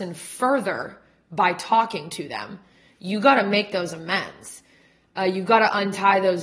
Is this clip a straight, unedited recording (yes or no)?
yes